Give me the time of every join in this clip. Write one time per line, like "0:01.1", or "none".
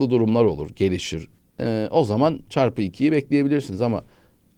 0:01.4